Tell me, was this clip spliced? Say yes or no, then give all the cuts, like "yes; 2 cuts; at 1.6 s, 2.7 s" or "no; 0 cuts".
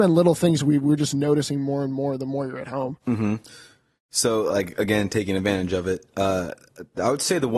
no; 0 cuts